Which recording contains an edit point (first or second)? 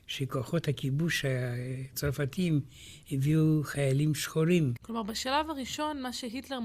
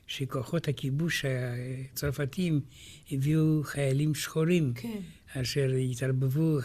first